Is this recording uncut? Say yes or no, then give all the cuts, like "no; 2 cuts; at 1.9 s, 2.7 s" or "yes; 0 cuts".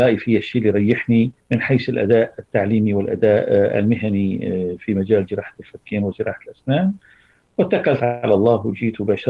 no; 1 cut; at 1.4 s